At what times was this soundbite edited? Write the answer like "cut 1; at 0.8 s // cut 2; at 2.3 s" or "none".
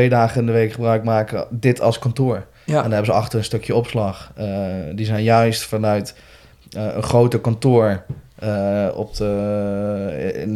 none